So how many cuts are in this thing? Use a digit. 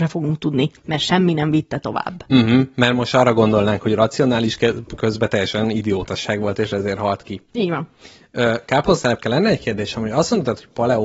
0